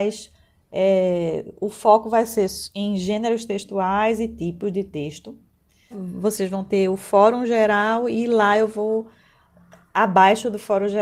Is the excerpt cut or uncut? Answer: cut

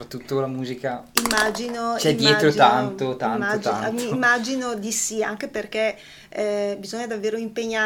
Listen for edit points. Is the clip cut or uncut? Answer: uncut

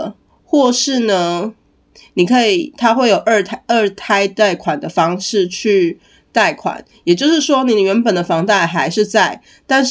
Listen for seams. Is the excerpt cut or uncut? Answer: uncut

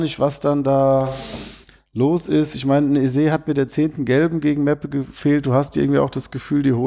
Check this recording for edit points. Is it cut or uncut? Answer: uncut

